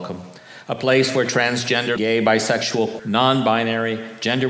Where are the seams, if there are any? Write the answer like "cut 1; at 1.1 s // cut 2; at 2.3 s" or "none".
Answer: cut 1; at 2.0 s // cut 2; at 3.0 s